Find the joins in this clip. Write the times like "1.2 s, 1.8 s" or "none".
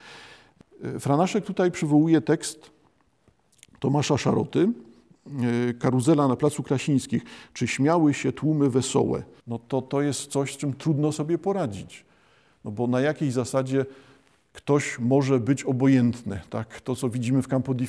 9.4 s